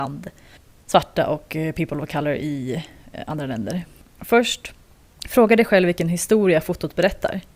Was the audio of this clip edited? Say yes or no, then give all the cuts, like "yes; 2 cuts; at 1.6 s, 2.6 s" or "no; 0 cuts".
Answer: no; 0 cuts